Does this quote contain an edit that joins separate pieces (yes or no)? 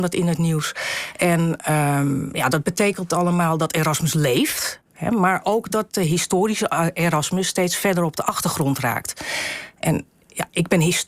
yes